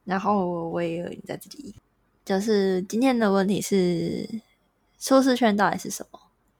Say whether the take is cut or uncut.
uncut